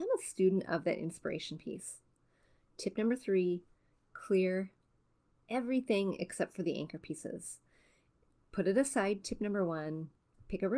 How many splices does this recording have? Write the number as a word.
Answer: one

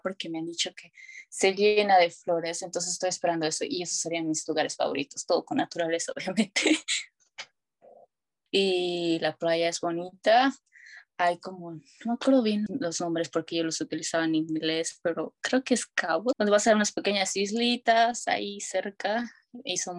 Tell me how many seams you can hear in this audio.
three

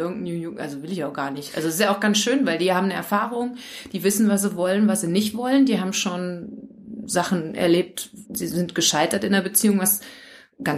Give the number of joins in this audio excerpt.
one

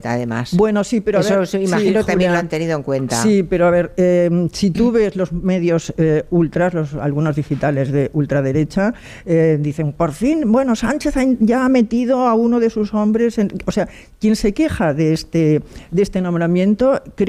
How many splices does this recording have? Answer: zero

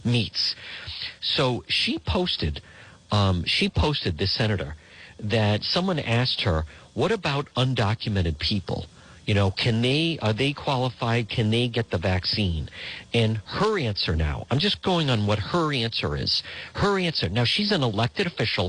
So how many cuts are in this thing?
zero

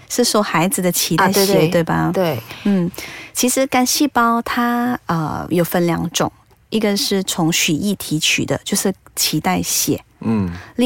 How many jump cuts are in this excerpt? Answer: zero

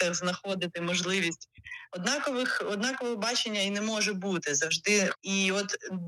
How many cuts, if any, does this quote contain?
two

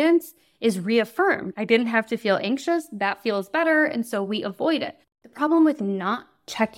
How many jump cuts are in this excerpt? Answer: one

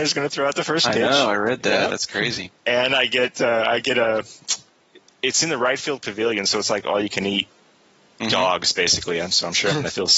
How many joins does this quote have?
zero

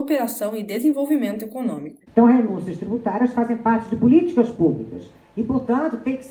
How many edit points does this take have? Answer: one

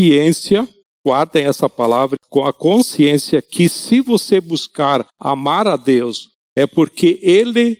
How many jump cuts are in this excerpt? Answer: one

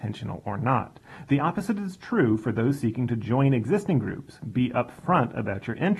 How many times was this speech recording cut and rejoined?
zero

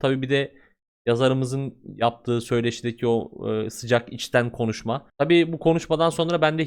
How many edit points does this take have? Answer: one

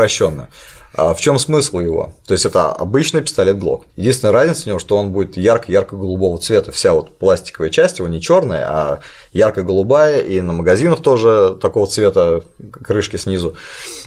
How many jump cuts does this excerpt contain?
one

